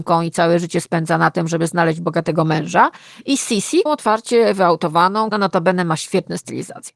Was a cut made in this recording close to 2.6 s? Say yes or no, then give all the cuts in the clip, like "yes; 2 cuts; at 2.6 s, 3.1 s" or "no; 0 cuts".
no; 2 cuts; at 3.9 s, 5.3 s